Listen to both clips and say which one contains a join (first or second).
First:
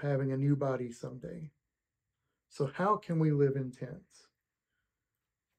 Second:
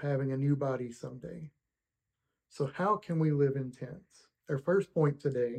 second